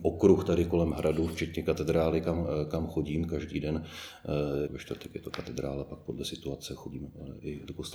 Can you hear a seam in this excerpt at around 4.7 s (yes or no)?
yes